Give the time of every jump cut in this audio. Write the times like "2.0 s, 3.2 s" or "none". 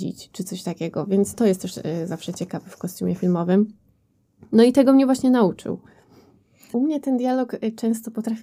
1.3 s, 6.7 s